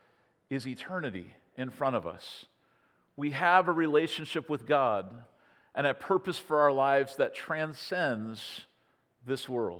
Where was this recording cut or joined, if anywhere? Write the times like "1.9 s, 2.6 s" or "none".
none